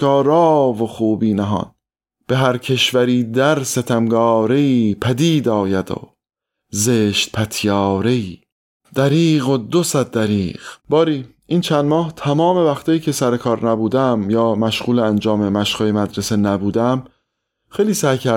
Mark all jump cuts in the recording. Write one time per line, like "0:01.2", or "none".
0:08.8
0:10.8